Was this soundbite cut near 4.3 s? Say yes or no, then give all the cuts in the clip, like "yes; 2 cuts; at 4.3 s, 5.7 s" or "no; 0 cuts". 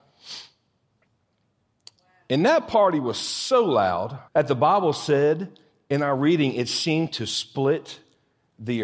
yes; 1 cut; at 4.3 s